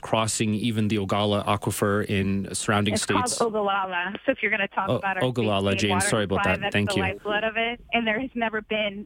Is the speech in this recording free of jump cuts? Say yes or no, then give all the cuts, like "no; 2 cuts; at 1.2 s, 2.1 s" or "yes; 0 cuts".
yes; 0 cuts